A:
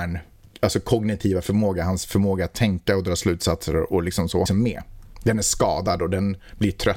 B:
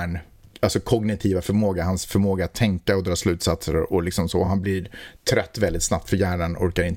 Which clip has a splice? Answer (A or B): A